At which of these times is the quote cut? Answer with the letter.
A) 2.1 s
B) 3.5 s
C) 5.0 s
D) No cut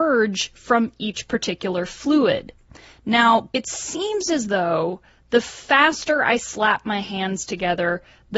B